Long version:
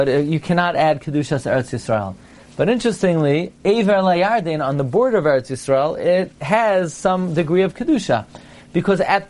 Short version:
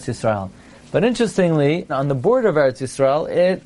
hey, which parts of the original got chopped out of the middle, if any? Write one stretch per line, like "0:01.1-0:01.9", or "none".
0:03.5-0:04.6

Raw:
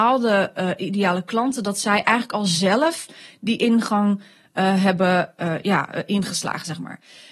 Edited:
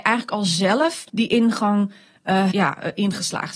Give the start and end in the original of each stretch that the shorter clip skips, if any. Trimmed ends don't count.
0:03.1-0:03.4
0:04.8-0:05.6

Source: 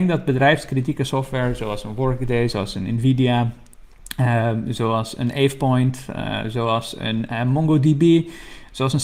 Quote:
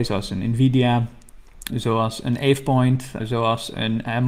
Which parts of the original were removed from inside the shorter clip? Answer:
0:04.1-0:04.6
0:06.1-0:06.4

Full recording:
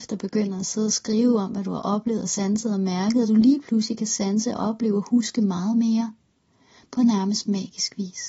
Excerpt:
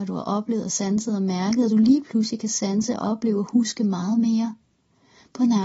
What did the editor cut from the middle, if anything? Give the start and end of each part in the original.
none

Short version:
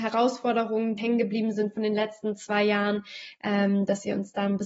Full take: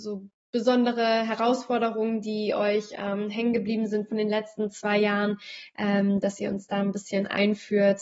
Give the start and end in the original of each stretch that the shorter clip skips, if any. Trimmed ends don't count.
0:02.2-0:03.3

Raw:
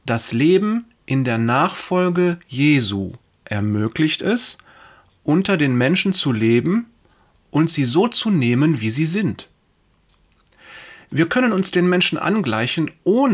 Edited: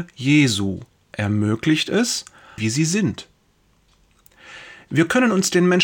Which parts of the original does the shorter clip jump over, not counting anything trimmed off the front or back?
0:04.9-0:08.8

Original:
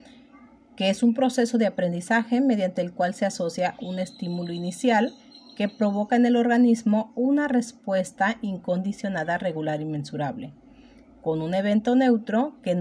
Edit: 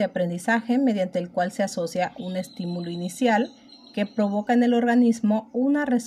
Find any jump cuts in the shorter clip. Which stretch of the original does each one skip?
none

